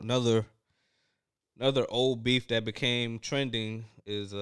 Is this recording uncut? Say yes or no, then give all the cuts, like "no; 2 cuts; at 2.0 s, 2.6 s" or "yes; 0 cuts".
yes; 0 cuts